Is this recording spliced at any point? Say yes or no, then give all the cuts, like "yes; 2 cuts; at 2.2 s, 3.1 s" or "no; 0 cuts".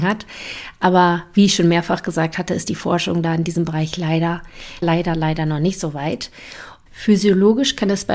yes; 2 cuts; at 4.8 s, 6.9 s